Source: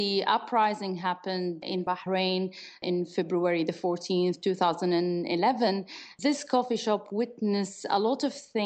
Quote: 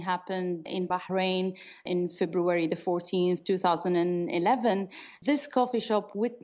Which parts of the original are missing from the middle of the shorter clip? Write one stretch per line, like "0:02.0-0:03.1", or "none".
none